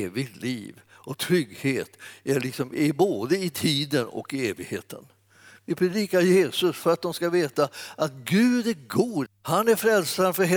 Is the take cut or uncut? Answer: cut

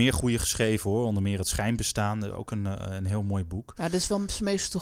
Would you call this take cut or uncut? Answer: uncut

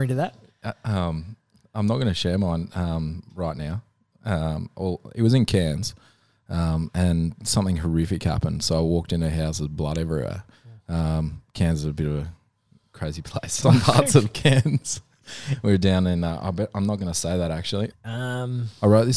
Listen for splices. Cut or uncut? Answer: cut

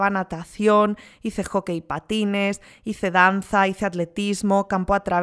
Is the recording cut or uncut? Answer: uncut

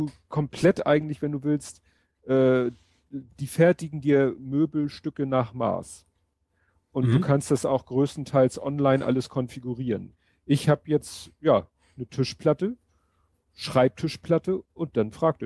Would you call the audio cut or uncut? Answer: uncut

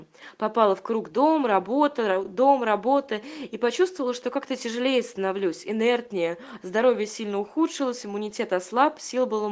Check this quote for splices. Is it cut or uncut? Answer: uncut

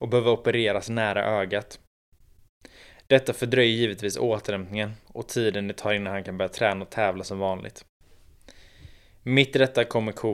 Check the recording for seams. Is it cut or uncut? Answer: uncut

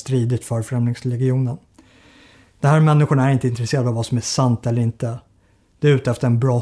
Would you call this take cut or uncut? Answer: uncut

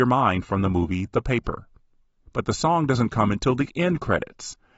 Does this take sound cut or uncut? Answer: cut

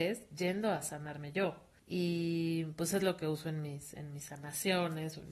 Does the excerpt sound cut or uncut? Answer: cut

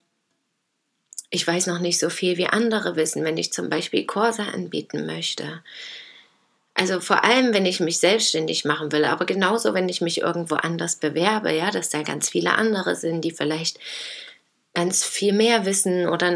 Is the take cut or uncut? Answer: uncut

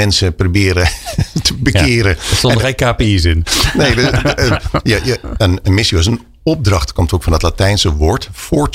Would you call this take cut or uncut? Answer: uncut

